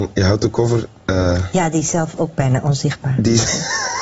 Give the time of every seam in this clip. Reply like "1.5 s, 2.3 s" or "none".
none